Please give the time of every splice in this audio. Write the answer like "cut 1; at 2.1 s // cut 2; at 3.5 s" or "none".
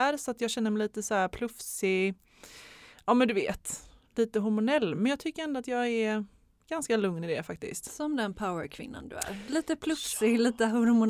none